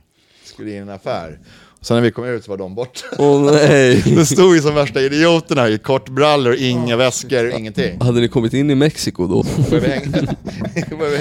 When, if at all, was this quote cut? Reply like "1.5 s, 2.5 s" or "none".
7.5 s, 9.4 s